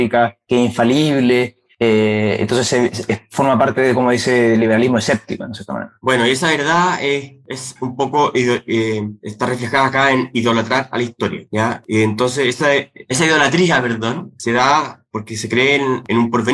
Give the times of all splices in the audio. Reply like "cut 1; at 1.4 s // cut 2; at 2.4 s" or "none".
none